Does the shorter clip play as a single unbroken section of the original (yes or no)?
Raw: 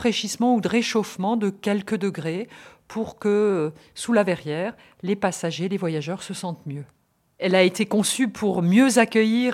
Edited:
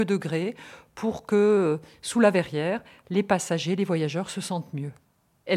yes